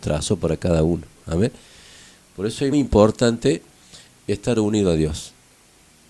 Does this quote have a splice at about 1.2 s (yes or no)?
no